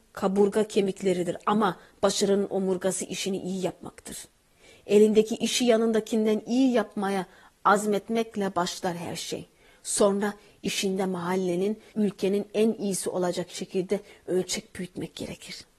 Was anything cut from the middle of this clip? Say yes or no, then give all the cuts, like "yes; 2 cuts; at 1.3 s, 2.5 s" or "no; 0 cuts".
yes; 1 cut; at 11.9 s